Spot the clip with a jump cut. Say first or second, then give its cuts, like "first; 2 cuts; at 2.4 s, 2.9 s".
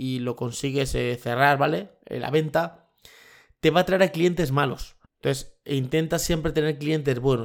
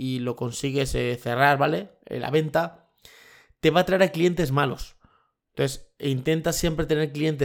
first; 1 cut; at 5.0 s